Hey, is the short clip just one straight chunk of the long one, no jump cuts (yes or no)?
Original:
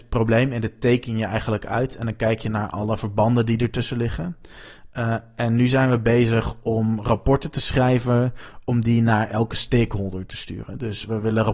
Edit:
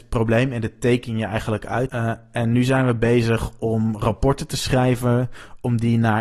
no